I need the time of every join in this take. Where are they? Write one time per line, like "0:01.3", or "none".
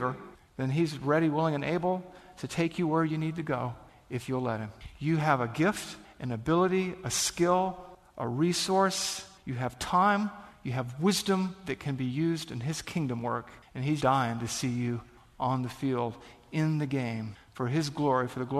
0:14.0